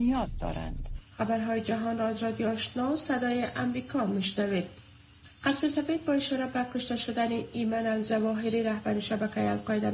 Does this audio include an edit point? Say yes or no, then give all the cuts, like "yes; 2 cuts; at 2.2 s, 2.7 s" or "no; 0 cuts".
no; 0 cuts